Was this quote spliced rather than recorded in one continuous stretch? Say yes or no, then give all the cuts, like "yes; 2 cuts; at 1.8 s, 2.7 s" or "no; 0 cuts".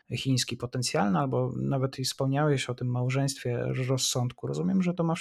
no; 0 cuts